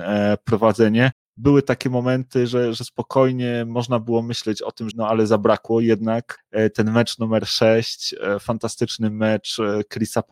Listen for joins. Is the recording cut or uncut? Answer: cut